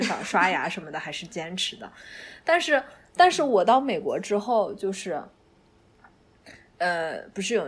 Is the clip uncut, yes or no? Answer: yes